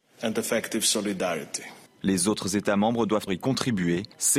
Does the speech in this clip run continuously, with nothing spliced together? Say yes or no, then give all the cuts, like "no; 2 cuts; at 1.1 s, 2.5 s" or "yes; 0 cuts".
no; 2 cuts; at 2.0 s, 3.3 s